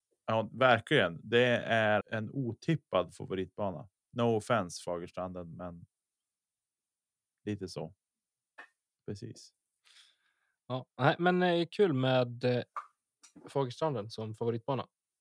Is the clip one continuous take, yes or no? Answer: no